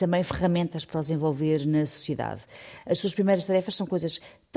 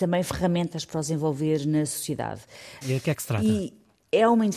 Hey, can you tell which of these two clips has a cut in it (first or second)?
second